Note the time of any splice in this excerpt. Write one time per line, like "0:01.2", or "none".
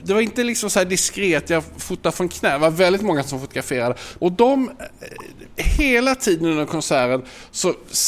0:04.2